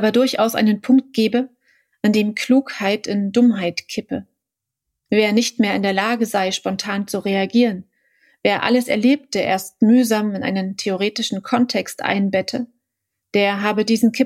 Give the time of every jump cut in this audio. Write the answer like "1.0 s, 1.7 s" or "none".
none